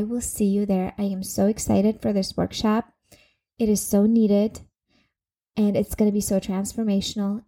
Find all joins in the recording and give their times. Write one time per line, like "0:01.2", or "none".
none